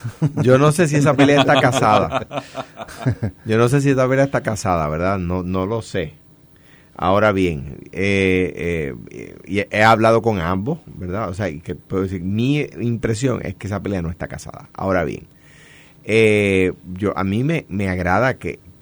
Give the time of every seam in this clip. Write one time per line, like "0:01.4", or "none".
none